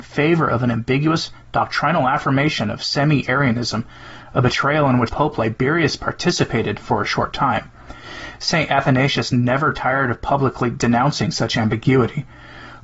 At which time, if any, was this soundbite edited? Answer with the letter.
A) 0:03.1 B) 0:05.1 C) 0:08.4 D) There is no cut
B